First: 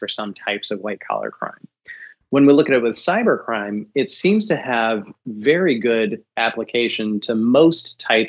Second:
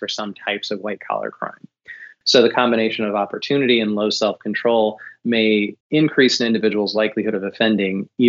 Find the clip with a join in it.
second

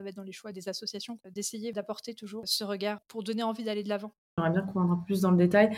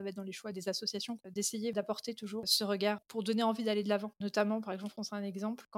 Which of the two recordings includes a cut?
first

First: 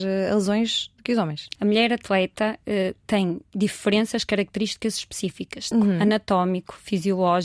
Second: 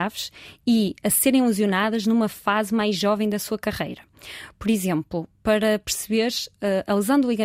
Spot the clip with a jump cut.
first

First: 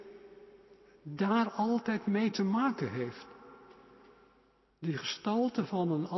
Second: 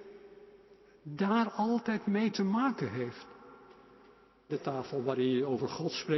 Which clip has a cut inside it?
second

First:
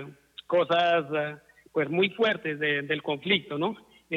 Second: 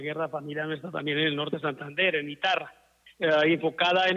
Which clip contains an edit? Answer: second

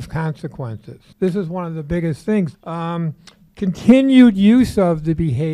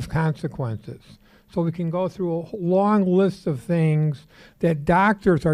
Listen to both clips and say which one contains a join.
first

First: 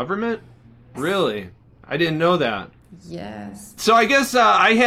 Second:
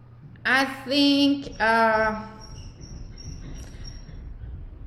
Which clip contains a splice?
first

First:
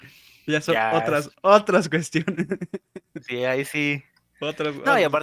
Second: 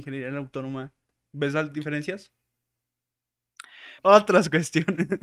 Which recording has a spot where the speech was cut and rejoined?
second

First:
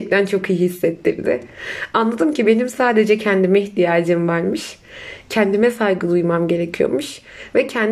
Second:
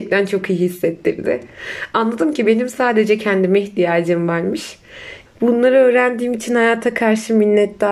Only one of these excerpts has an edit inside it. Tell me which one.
second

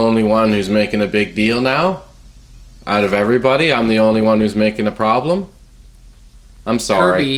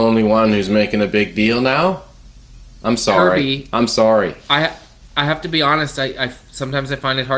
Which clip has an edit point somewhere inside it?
second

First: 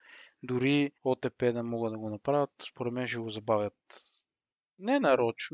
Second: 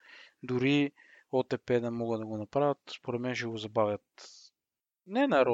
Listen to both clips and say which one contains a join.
first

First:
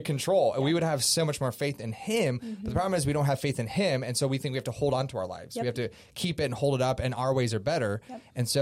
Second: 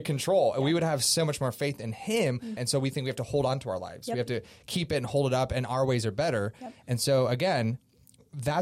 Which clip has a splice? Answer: second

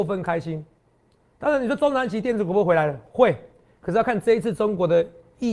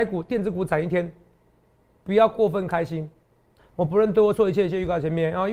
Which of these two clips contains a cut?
second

